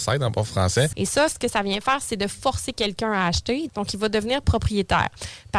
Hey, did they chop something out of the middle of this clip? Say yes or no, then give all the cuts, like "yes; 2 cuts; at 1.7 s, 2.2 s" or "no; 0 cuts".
yes; 2 cuts; at 0.9 s, 3.7 s